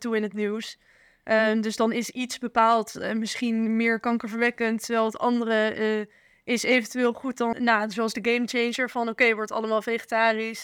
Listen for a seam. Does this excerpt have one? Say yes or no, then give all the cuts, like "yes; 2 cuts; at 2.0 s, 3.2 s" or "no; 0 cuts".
yes; 1 cut; at 7.5 s